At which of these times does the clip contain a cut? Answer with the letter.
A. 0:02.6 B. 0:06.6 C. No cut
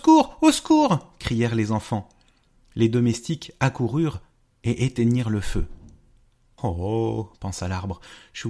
B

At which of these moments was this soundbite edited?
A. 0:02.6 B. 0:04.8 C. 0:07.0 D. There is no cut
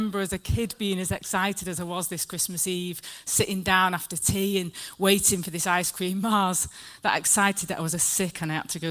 D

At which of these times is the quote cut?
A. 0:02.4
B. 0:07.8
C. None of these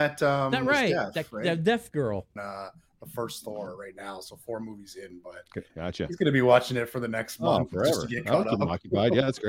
A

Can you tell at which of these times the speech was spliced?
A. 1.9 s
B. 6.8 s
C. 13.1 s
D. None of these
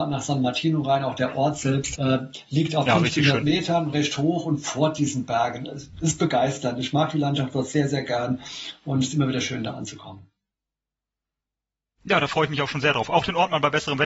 A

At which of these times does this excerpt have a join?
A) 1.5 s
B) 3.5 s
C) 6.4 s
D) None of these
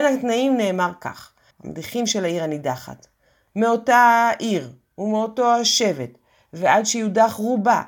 A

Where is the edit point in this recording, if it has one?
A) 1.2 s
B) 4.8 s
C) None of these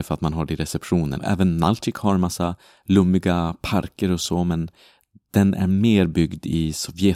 A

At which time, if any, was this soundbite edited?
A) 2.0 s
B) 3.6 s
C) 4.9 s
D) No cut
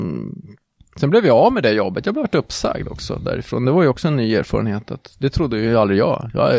D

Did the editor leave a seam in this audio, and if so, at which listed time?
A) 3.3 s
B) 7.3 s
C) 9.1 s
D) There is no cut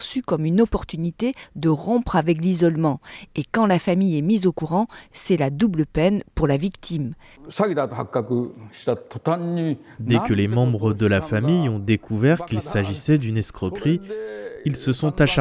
B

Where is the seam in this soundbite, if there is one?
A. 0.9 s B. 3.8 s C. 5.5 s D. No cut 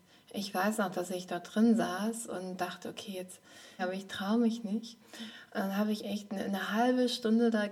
B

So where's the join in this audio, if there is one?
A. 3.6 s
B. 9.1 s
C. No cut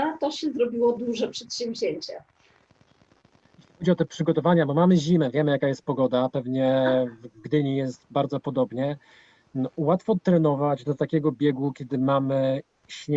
C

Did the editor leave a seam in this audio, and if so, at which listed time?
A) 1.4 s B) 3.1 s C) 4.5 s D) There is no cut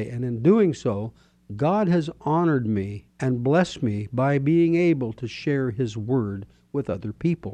B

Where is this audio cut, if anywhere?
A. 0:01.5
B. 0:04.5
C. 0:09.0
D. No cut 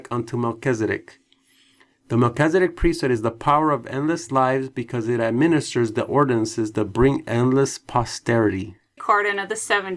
C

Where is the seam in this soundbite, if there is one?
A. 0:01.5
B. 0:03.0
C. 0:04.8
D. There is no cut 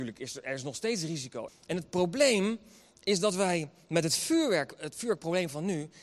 A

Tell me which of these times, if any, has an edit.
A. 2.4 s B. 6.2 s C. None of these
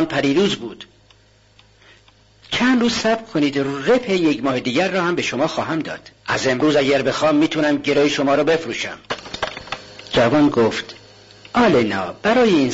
B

